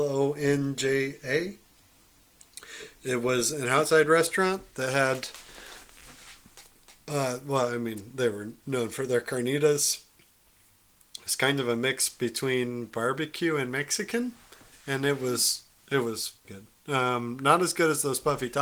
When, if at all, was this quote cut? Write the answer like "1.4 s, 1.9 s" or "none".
16.4 s